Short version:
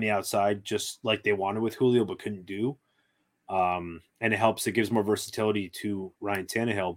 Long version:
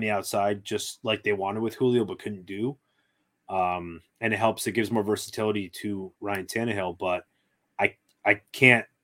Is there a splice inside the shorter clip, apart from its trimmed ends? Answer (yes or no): no